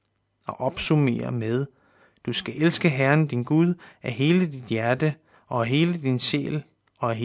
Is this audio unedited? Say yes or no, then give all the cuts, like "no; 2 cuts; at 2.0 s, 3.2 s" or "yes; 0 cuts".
yes; 0 cuts